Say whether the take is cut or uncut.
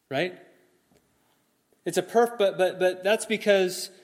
uncut